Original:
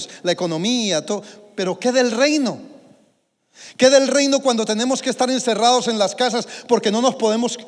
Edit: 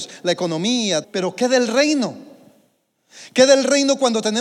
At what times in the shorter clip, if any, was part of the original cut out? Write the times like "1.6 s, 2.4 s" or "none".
1.0 s